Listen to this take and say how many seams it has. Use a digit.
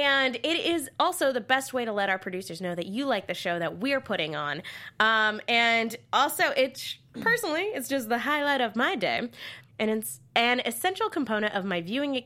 1